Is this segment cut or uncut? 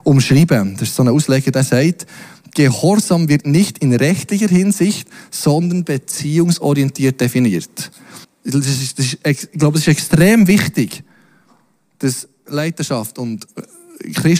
cut